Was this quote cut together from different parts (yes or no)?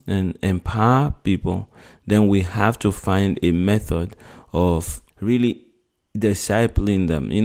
yes